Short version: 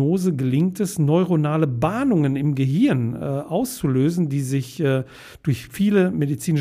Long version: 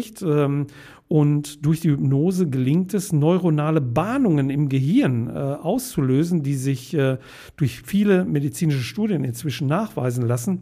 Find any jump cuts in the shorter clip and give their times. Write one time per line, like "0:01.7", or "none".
none

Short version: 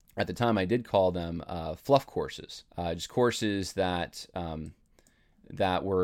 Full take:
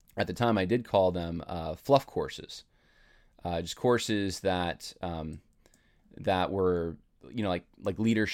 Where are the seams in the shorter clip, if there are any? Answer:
0:02.7

